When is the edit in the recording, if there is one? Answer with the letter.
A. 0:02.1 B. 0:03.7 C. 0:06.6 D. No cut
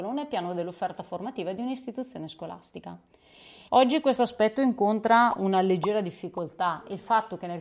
B